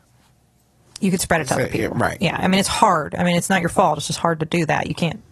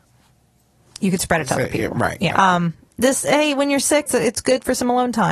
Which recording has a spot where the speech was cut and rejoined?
second; 2 cuts; at 2.3 s, 4.1 s

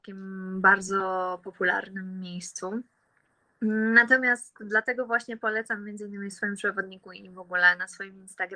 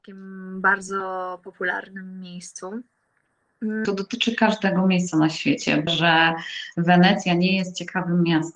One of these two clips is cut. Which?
second; 2 cuts; at 3.9 s, 5.9 s

